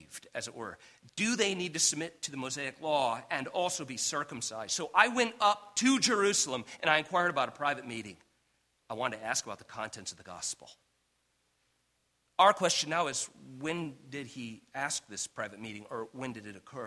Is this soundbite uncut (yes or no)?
yes